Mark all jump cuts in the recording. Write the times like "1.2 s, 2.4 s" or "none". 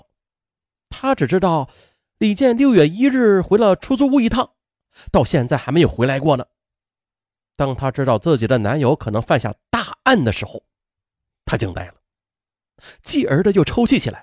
none